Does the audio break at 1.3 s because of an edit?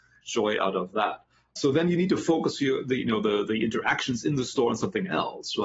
no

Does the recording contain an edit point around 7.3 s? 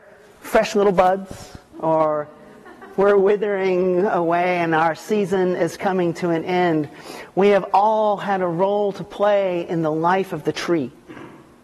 no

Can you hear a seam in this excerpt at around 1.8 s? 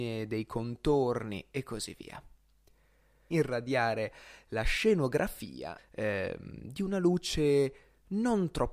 no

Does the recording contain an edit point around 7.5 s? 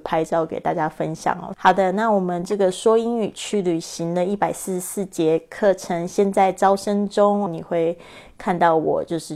yes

